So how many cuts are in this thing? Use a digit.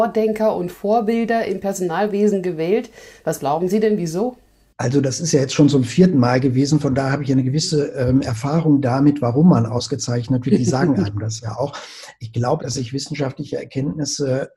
1